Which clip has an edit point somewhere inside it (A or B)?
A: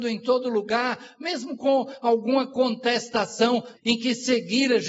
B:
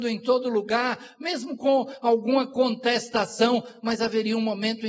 A